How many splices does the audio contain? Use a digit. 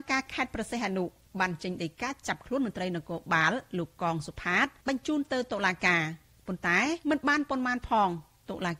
2